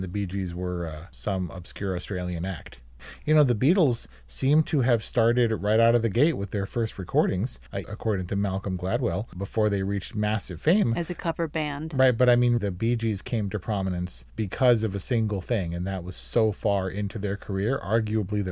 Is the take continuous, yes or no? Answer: no